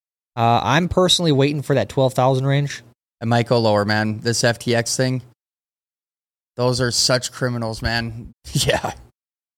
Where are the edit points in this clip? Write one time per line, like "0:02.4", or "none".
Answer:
0:03.1
0:08.3